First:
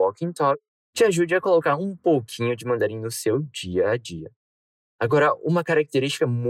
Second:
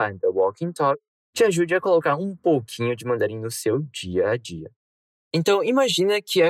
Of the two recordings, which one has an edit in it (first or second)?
second